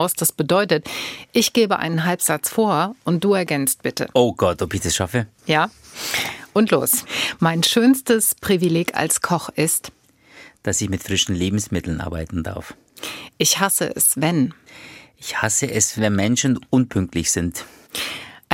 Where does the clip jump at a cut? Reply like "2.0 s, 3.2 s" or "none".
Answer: 16.0 s